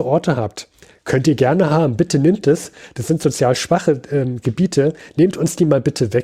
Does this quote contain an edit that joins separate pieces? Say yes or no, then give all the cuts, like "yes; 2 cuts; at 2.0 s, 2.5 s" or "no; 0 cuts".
no; 0 cuts